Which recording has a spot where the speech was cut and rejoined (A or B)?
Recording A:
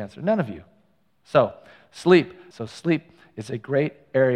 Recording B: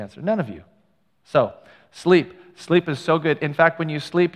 A